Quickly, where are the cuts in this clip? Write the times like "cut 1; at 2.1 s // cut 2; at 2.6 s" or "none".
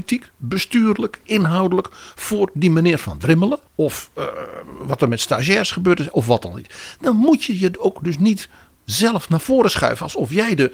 cut 1; at 3.7 s